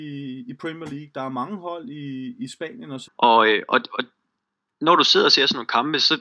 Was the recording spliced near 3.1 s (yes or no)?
yes